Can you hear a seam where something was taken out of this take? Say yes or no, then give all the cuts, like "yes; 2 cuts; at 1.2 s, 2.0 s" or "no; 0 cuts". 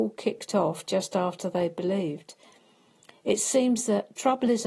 no; 0 cuts